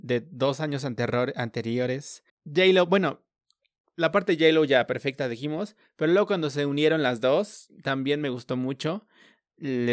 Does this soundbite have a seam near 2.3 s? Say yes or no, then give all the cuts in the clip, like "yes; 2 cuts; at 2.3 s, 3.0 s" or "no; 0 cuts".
yes; 1 cut; at 2.3 s